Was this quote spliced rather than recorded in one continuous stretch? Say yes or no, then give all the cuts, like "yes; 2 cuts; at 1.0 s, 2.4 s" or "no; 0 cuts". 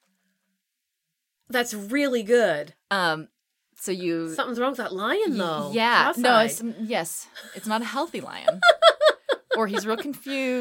no; 0 cuts